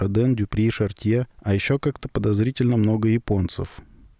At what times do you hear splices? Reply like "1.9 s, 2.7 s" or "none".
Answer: 1.3 s